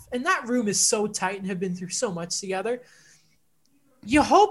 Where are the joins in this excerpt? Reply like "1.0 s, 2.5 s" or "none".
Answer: none